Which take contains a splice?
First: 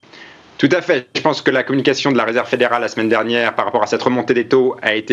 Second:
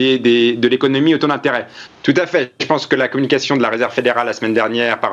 second; 1 cut; at 1.9 s

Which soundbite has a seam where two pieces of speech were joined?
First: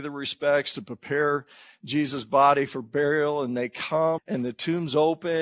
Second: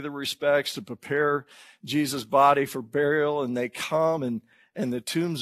first; 1 cut; at 4.2 s

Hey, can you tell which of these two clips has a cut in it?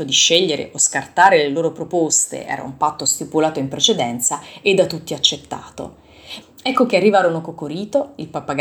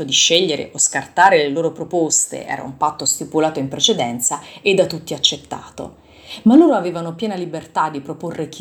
first; 1 cut; at 6.4 s

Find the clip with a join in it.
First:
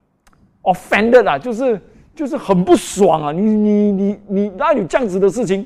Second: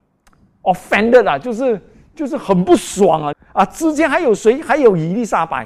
second; 1 cut; at 3.3 s

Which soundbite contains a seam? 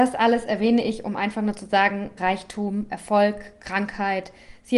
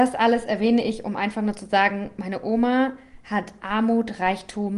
first; 1 cut; at 2.2 s

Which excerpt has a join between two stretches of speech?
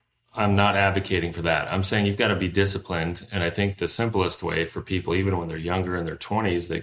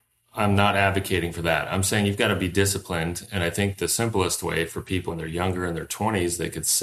second; 1 cut; at 5.1 s

